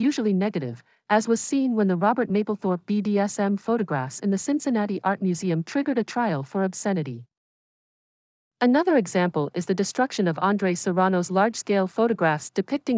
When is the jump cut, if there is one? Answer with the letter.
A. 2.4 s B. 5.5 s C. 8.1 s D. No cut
D